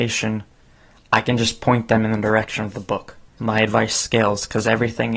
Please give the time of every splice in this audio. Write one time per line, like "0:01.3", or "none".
0:03.4

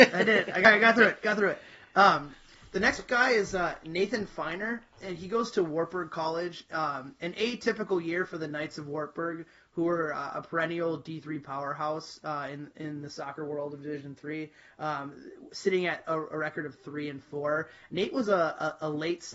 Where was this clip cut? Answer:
none

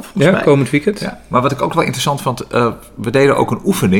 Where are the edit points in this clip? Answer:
none

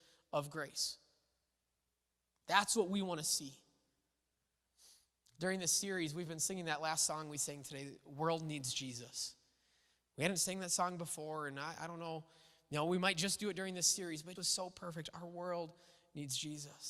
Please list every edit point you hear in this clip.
0:14.4

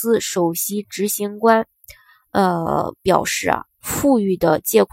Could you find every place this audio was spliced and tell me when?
0:03.7

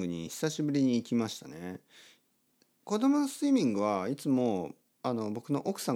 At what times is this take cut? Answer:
none

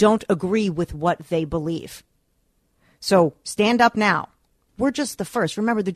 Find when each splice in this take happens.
0:04.7

